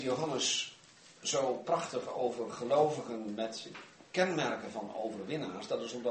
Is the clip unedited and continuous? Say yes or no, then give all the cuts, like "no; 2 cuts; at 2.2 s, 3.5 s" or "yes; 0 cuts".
no; 1 cut; at 1.2 s